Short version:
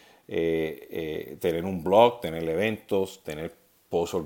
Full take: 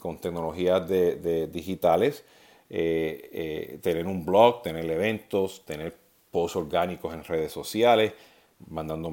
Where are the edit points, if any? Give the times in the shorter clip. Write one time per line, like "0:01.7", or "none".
none